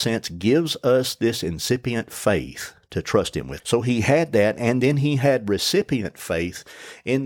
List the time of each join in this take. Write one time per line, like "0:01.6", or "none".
0:03.6